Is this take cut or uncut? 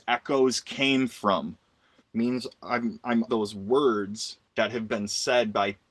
cut